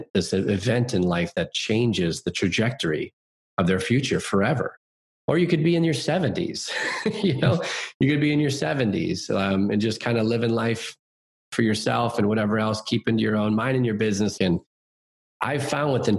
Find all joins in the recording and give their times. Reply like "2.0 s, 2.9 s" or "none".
5.1 s, 14.4 s